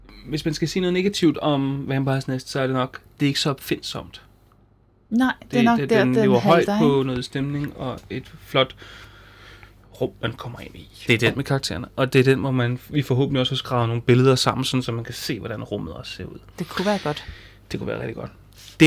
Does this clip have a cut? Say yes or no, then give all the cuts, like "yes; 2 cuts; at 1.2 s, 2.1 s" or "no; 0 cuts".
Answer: yes; 1 cut; at 11.1 s